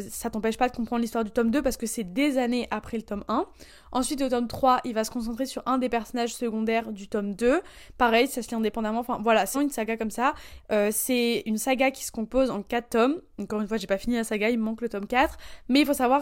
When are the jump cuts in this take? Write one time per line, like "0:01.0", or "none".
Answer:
0:09.5
0:10.6